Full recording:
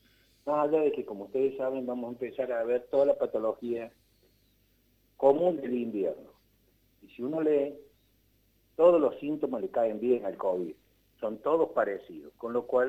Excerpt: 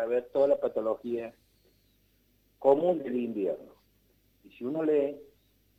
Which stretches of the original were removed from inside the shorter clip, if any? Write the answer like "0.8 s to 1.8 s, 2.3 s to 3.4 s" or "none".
none